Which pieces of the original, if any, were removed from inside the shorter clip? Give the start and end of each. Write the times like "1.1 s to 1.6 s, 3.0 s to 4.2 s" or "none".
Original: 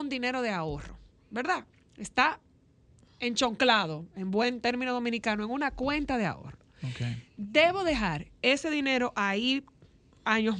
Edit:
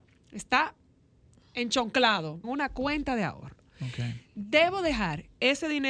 4.1 s to 5.5 s